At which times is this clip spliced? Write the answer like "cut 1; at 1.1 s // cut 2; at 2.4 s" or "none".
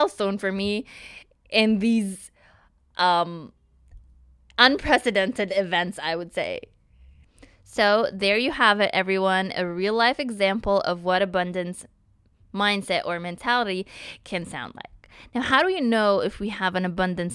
none